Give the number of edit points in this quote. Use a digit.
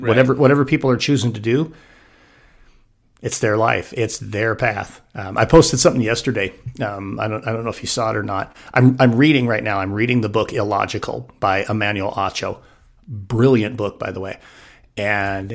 0